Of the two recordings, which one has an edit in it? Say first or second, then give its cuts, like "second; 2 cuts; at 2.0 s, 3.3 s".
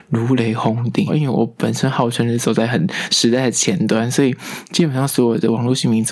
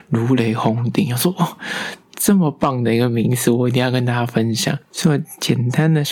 first; 1 cut; at 1.1 s